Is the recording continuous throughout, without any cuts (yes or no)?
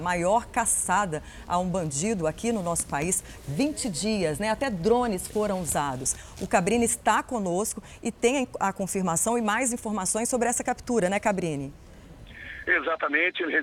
yes